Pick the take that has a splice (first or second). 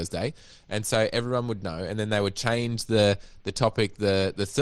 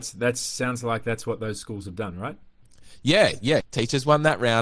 second